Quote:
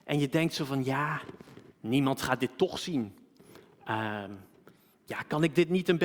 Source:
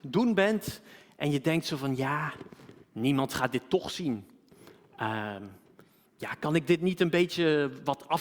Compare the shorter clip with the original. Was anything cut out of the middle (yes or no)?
no